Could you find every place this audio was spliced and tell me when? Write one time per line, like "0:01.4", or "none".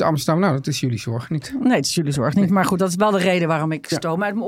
none